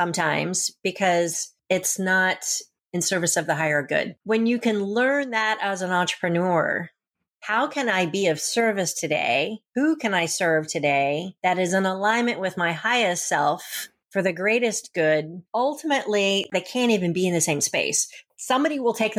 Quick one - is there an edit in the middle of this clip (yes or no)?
yes